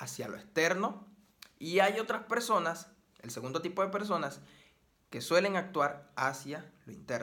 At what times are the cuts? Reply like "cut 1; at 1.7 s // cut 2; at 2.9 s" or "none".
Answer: none